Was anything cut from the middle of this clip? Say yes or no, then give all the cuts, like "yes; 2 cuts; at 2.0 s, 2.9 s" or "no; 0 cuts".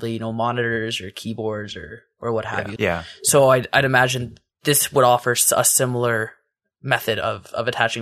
yes; 1 cut; at 2.8 s